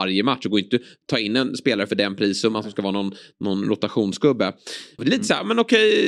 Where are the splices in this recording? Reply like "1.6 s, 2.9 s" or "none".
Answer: 5.0 s